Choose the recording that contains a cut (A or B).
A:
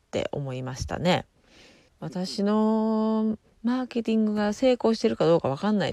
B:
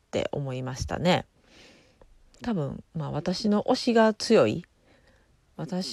A